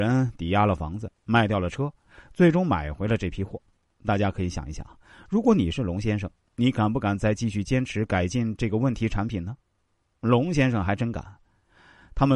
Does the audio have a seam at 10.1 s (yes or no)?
no